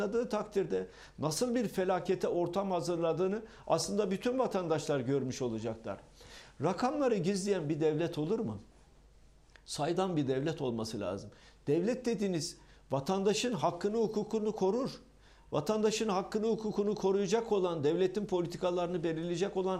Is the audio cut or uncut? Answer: cut